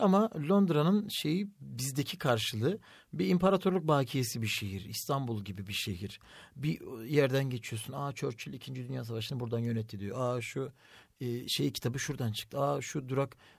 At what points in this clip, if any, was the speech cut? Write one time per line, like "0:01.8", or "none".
none

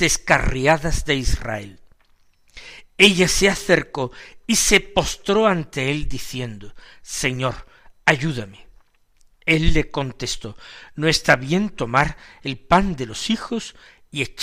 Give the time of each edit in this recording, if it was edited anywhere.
none

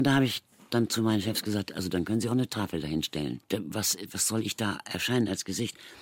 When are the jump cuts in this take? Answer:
none

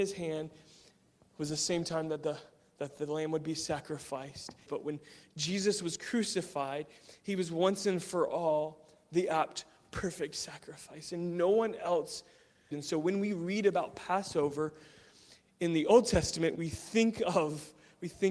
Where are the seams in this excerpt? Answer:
0:04.7
0:12.7
0:16.5

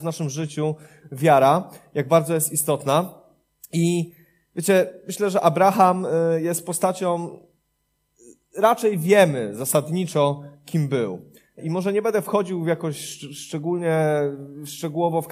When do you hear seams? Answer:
none

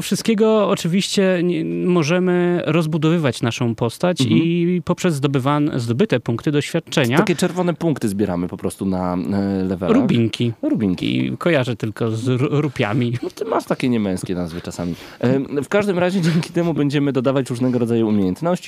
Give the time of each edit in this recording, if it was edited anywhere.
0:11.0

